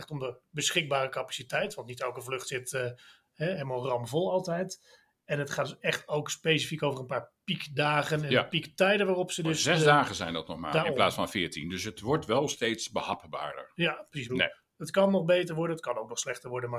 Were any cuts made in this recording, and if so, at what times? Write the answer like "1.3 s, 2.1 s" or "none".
14.3 s